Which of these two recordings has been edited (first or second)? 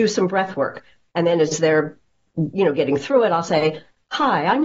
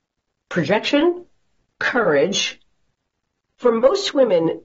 second